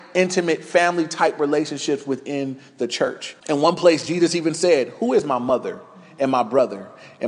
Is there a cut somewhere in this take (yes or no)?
yes